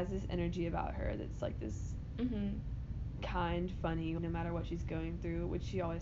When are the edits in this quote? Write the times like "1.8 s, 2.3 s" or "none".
4.2 s